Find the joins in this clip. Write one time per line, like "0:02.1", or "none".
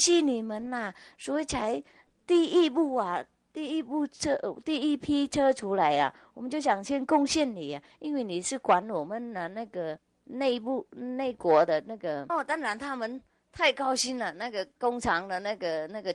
0:12.3